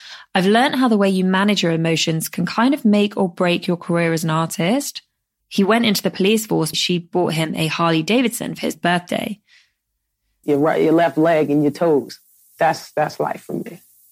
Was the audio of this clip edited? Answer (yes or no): yes